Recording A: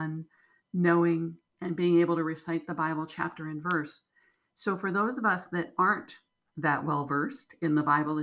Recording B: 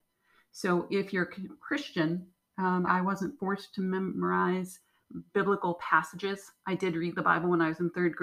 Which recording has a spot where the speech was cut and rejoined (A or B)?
B